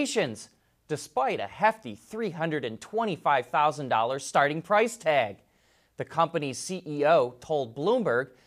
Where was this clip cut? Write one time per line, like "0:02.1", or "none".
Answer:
none

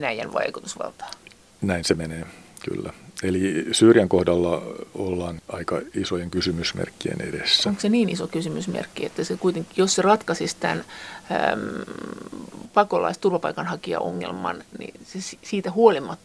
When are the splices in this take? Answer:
none

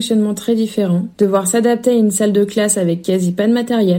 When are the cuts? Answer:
0:01.1

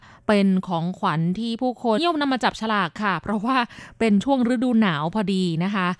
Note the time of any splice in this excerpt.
0:02.0

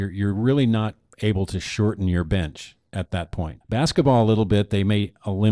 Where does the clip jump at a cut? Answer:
0:03.6

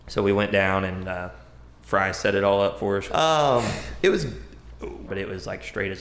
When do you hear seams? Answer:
0:03.1
0:05.1

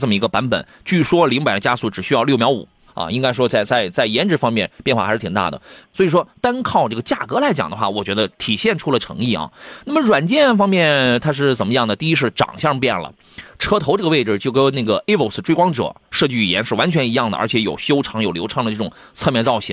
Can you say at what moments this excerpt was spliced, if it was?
0:02.9
0:05.8

